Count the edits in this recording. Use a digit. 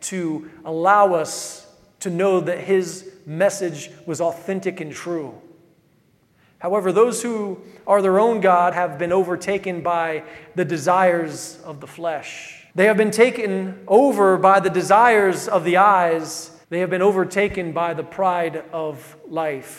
3